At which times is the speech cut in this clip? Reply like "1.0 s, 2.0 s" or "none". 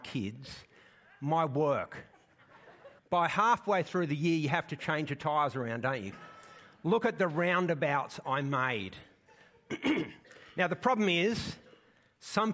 3.0 s, 6.1 s